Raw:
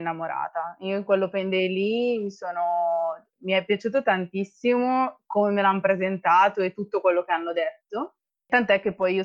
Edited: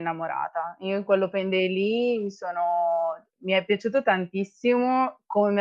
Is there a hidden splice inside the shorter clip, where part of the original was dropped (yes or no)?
no